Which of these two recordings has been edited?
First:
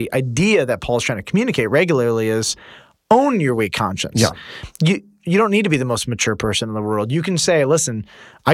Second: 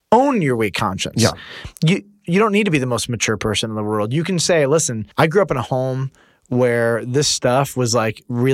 second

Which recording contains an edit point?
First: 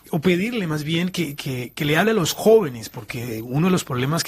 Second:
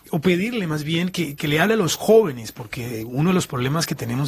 second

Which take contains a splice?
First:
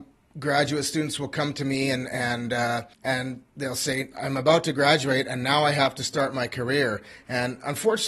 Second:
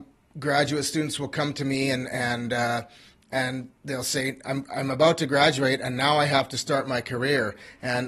first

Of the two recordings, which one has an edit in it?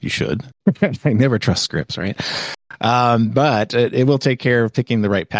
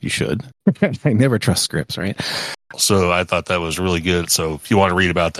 second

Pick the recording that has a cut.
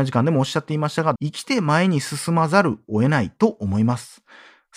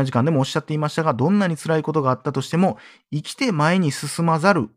first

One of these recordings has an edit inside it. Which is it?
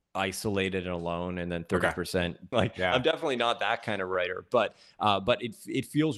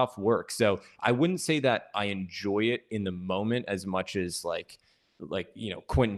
first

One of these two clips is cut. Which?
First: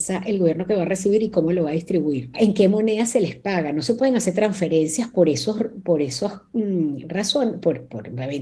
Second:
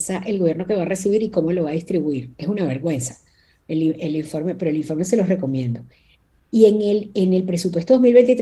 first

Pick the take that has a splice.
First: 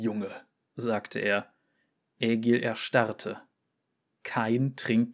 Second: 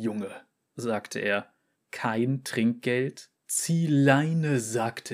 second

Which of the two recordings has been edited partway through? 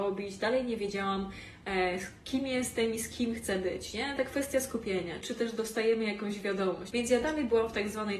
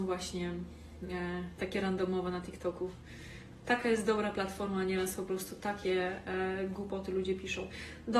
first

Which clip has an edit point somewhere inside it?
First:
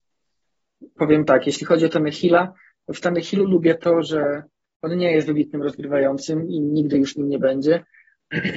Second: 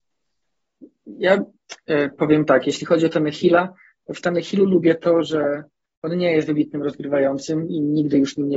first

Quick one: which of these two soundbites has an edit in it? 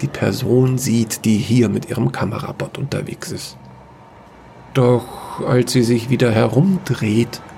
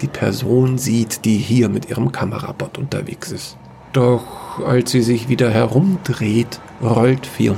second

